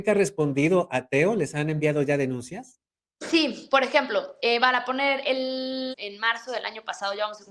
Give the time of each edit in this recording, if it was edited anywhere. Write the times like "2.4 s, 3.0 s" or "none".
5.9 s